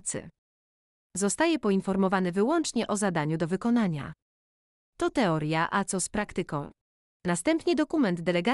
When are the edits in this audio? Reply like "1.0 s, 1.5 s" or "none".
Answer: 7.1 s